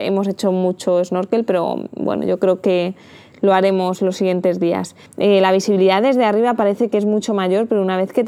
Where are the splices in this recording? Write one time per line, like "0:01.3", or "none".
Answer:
0:05.1